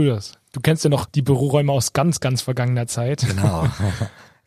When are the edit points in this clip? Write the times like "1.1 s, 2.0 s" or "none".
none